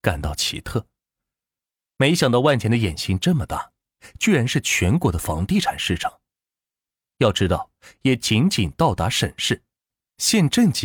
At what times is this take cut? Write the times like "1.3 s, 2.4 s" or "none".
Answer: 7.9 s